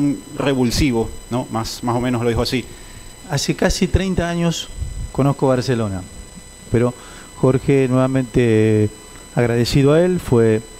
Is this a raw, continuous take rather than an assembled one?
no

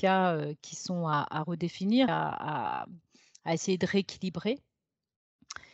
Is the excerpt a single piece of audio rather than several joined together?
no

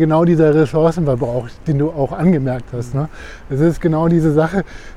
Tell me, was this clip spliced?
no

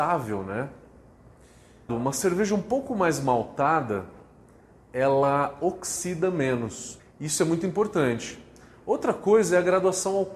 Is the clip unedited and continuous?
no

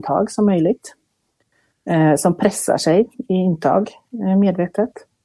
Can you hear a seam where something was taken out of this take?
no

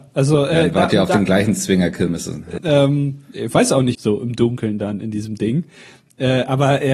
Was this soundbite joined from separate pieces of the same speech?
yes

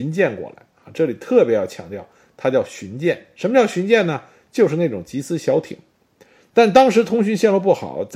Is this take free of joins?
yes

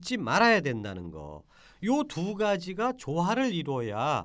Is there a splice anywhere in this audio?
no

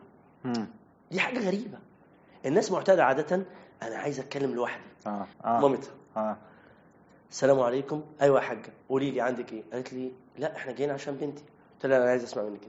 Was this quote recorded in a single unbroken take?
no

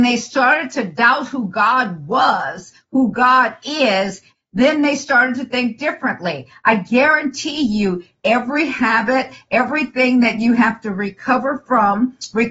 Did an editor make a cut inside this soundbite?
yes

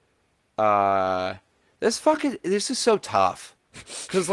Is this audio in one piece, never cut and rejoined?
yes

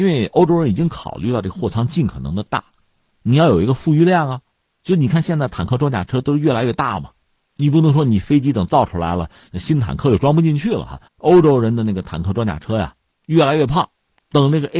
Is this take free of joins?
no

